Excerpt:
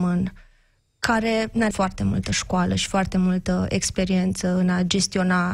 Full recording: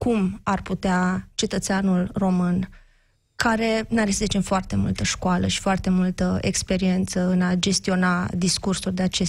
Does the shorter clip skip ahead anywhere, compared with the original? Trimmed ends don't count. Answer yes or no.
yes